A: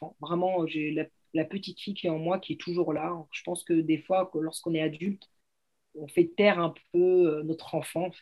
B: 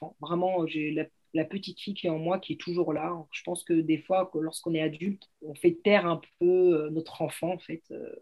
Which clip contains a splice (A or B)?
B